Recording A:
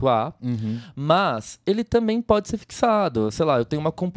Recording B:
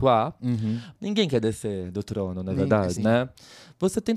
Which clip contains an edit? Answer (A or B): B